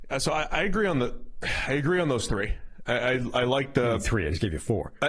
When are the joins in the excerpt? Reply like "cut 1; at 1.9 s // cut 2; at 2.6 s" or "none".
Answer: none